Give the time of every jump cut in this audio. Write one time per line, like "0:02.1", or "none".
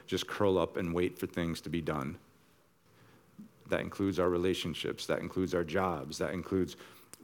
0:03.6